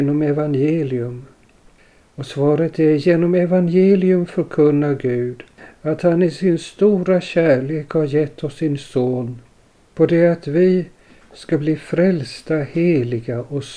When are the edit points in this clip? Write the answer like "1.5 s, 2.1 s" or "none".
9.9 s